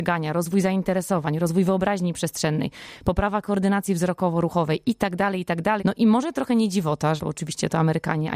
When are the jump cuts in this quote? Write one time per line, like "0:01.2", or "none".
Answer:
0:05.8
0:07.2